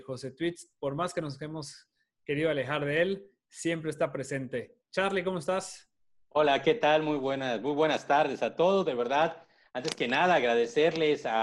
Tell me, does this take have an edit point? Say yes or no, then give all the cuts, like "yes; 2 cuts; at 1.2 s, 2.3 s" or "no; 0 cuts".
no; 0 cuts